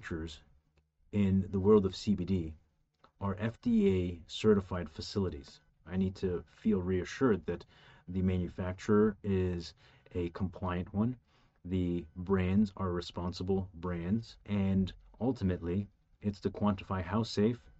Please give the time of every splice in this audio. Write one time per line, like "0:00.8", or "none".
0:05.7
0:14.4